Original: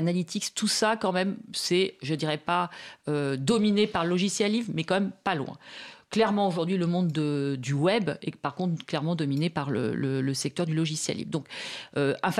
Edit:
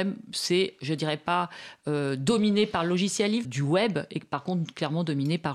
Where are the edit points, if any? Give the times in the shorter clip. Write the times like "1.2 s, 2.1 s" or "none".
3.4 s